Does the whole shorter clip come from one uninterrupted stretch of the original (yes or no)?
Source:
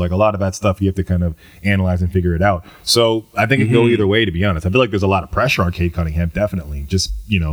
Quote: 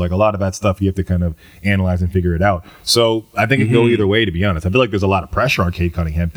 yes